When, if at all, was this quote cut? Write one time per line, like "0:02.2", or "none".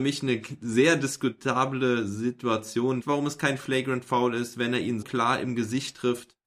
0:03.0
0:05.0